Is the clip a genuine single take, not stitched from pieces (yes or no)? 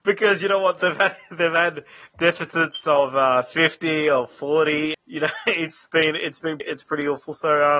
no